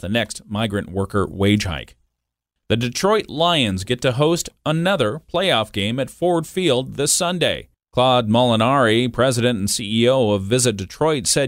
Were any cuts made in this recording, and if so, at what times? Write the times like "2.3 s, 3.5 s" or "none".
none

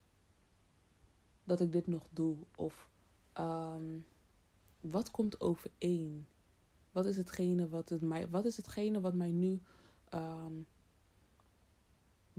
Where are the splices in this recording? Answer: none

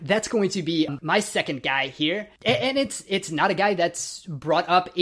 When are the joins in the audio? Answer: none

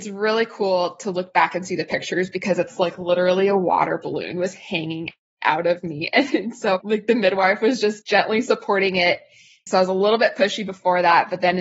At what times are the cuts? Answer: 9.7 s

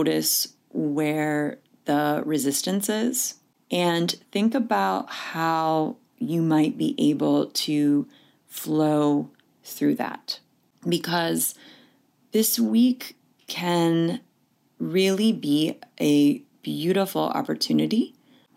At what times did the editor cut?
none

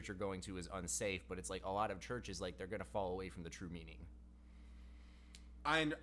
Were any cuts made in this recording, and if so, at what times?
none

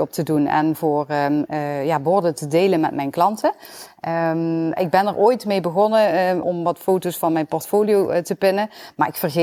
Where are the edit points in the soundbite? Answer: 4.8 s, 6.4 s

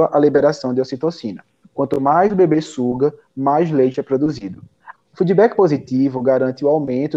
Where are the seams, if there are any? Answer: 1.6 s, 4.9 s

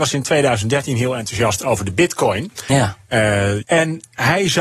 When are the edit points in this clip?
3.6 s

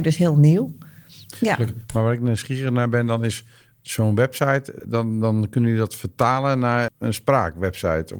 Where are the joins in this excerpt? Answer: 4.8 s, 6.9 s

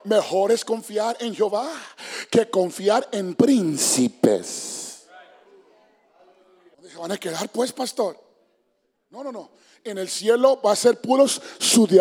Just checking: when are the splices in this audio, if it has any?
6.7 s

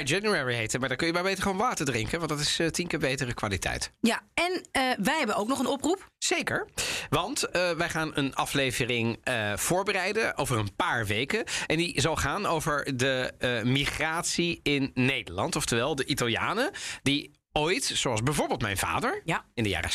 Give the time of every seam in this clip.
none

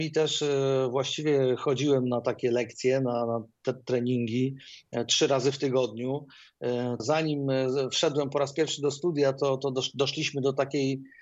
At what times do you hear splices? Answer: 7.0 s

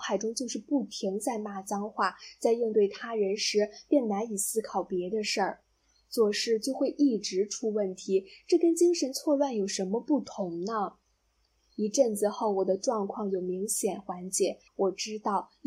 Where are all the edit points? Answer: 14.7 s

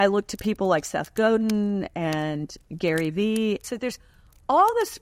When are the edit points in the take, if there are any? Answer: 3.6 s

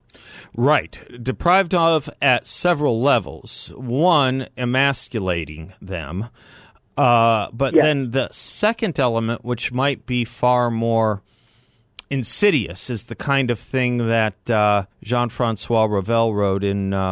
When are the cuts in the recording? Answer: 14.9 s

